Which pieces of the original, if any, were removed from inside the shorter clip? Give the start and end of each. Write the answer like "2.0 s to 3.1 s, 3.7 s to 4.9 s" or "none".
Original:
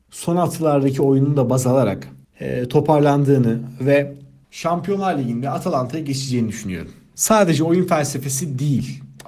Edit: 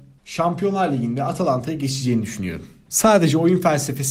none